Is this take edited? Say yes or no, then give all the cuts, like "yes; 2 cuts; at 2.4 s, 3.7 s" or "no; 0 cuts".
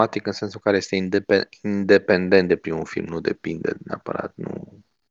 no; 0 cuts